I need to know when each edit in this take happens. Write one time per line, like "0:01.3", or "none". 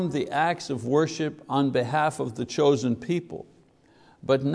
none